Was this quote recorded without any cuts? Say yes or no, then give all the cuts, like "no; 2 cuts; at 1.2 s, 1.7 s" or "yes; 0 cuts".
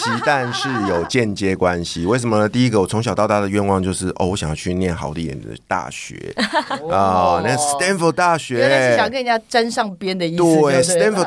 yes; 0 cuts